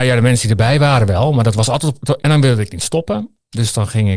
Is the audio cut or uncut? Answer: cut